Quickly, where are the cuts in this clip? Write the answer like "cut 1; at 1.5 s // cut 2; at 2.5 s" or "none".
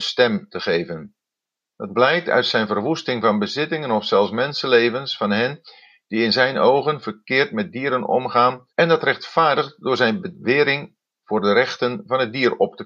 cut 1; at 1.7 s // cut 2; at 8.7 s